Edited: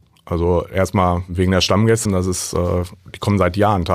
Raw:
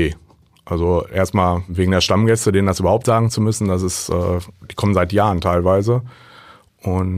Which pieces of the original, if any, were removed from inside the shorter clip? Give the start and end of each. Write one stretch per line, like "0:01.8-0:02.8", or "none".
0:02.5-0:03.6

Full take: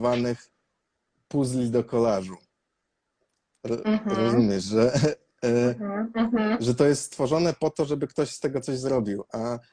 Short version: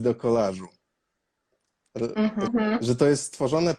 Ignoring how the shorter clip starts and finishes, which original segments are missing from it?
0:04.2-0:06.3

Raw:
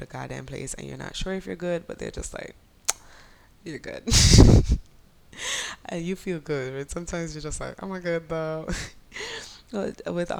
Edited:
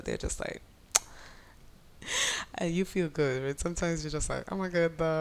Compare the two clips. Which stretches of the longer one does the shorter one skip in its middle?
0:03.5-0:04.9

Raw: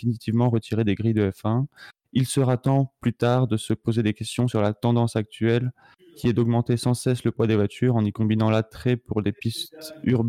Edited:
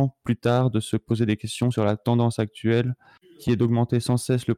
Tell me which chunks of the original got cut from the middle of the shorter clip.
none

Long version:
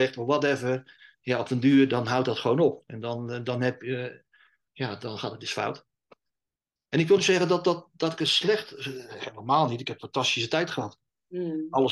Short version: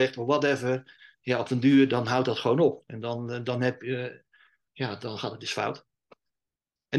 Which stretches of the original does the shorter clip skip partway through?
none

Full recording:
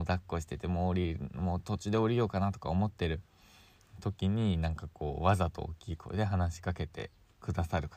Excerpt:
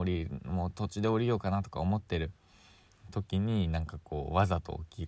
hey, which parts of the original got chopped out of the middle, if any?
none

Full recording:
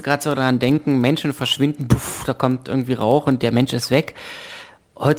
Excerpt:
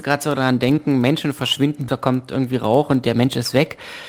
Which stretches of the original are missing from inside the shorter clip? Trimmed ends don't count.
0:01.9-0:02.2

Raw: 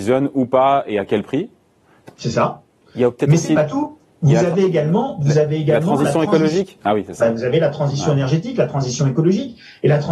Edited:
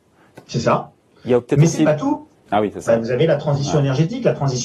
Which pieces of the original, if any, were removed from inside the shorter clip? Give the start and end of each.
0:04.2-0:06.8

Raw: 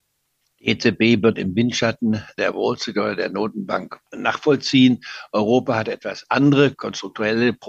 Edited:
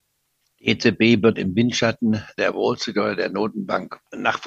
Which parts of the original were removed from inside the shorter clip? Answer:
none

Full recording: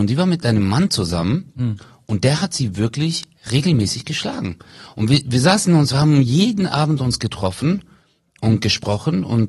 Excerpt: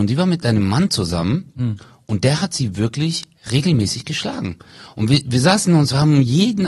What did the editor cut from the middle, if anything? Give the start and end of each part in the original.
none

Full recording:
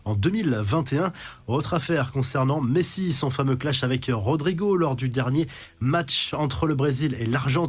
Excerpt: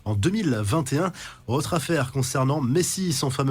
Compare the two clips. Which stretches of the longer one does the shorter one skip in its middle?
none

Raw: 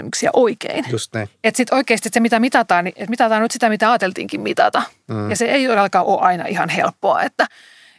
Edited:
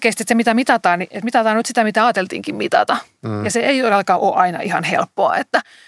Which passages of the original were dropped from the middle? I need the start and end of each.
none

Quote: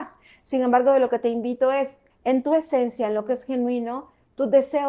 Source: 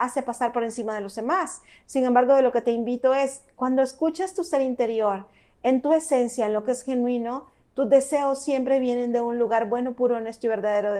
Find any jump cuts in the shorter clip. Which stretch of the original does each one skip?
0:03.5-0:05.5

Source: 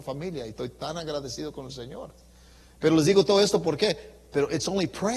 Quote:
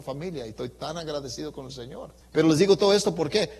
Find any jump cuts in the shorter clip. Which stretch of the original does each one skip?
0:02.2-0:02.7

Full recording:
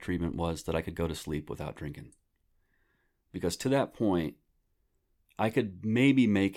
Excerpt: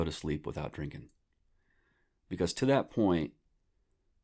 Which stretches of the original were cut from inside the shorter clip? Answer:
none

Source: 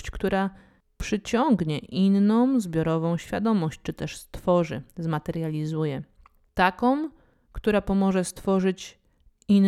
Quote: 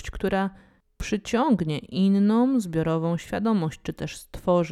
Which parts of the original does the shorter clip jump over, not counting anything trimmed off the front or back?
none

